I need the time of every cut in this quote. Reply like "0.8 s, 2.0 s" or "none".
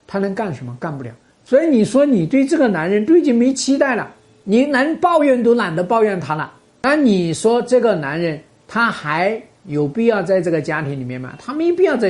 none